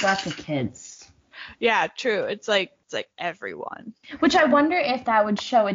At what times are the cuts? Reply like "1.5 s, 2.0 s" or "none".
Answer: 2.8 s